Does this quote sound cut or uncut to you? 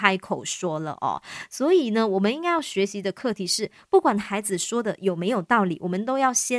uncut